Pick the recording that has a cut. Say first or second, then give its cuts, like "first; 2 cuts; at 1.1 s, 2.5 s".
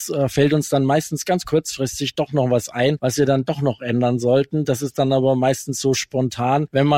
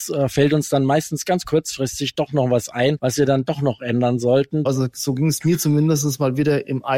second; 1 cut; at 4.7 s